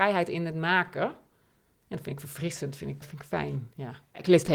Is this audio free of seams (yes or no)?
no